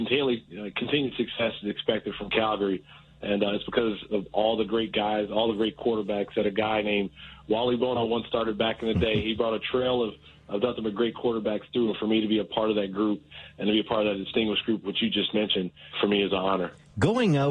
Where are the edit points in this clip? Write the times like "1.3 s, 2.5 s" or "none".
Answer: 15.9 s

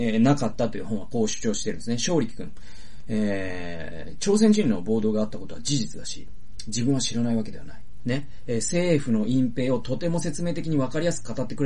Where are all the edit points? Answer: 8.0 s

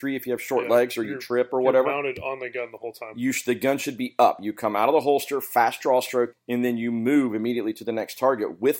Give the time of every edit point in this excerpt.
6.3 s

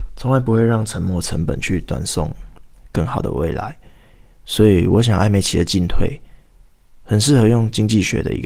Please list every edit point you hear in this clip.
none

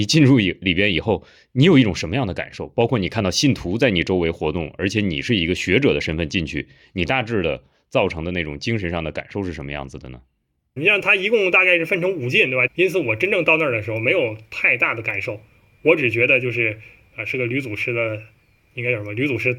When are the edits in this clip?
10.8 s, 12.7 s

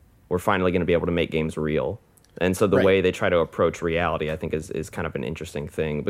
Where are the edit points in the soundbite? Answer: none

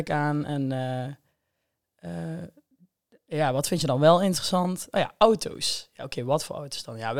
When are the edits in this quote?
none

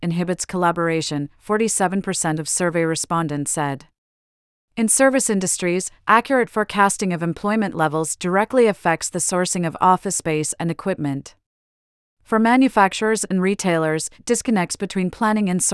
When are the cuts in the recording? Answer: 4.7 s

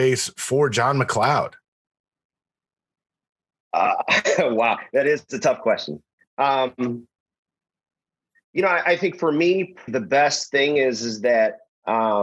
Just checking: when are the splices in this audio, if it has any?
6.2 s, 9.9 s

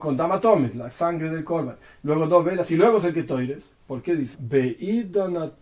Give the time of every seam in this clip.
4.3 s

